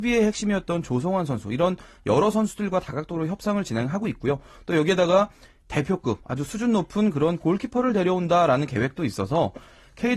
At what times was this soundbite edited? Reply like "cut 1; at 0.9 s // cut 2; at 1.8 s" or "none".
none